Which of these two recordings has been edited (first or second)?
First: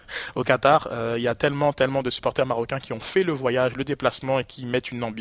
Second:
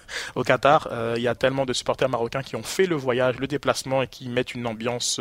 second